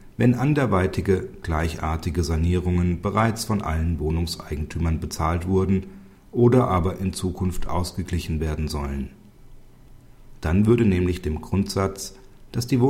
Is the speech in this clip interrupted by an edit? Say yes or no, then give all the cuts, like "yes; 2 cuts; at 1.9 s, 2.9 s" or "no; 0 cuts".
no; 0 cuts